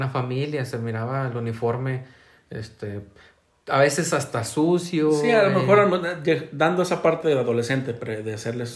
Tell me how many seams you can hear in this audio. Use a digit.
0